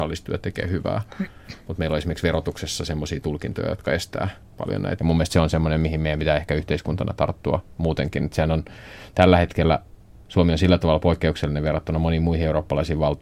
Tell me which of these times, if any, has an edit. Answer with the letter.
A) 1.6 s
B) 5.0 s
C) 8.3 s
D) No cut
B